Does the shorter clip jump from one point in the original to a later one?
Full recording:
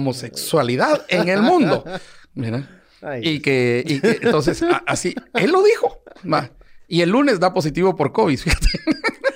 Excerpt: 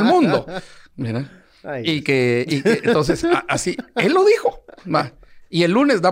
no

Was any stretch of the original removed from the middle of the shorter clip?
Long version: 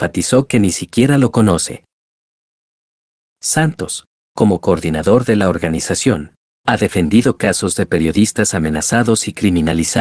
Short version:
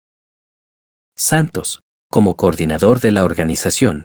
no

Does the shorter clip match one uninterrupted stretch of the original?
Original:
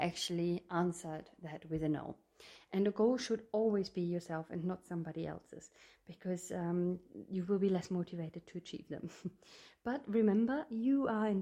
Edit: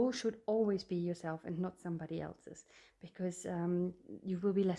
yes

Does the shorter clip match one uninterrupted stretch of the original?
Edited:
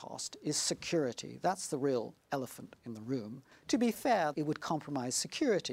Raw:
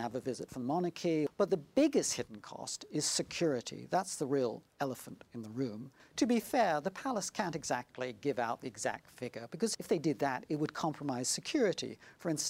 no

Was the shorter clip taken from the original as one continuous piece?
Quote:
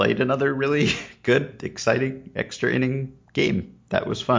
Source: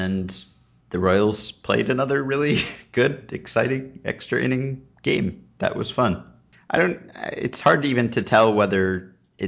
yes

